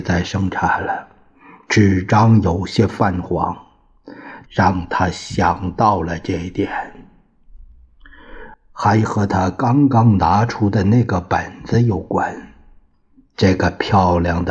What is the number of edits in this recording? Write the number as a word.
two